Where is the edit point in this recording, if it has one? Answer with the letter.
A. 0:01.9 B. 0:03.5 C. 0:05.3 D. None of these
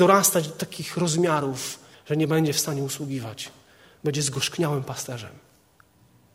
A